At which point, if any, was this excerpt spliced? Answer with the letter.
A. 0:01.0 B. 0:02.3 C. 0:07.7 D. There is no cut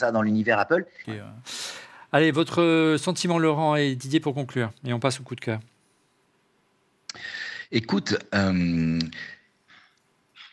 A